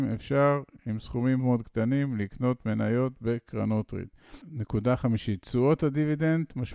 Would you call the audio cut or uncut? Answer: cut